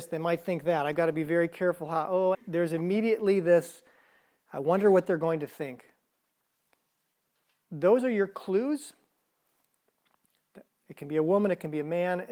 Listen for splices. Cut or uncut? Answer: cut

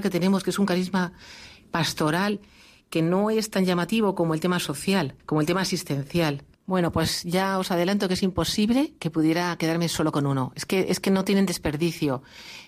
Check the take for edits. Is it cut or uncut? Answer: cut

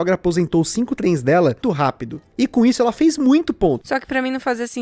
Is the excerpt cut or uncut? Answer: cut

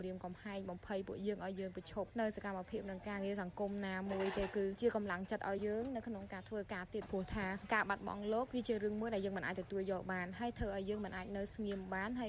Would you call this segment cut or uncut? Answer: cut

